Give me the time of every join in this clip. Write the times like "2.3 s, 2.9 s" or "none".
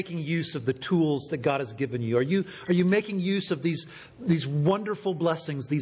none